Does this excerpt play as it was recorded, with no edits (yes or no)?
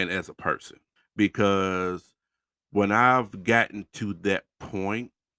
no